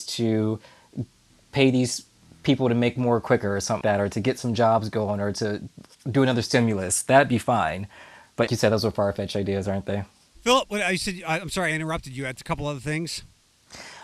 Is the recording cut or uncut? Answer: cut